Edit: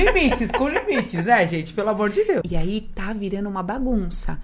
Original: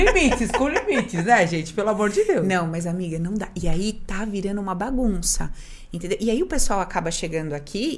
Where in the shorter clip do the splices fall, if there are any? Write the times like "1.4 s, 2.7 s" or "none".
2.4 s